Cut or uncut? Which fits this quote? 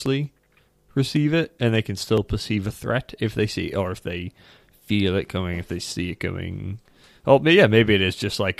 uncut